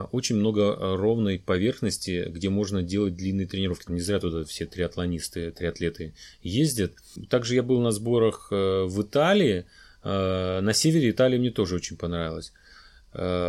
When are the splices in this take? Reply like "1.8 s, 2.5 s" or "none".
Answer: 3.9 s